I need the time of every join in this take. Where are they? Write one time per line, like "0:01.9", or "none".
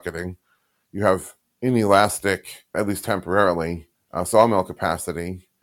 none